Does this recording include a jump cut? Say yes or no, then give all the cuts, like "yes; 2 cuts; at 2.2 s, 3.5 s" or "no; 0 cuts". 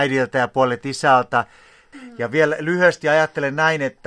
yes; 1 cut; at 1.9 s